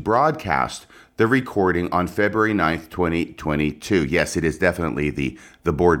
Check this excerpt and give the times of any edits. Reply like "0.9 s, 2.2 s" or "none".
none